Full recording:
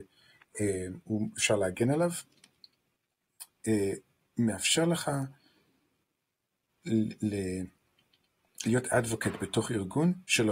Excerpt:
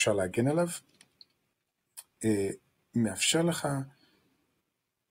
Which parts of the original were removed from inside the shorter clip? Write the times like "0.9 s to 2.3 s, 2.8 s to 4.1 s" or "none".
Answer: none